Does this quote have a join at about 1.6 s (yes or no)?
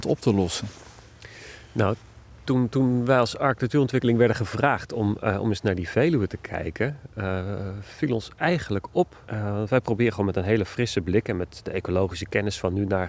no